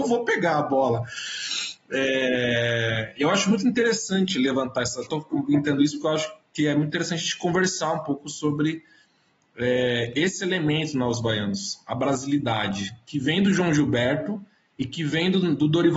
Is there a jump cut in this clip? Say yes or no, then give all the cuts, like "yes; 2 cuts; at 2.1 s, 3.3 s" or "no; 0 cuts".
no; 0 cuts